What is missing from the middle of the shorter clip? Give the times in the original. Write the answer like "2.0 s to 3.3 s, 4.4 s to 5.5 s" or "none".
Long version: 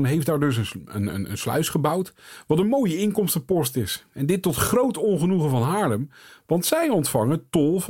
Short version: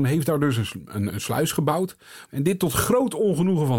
1.1 s to 1.3 s, 2.4 s to 4.1 s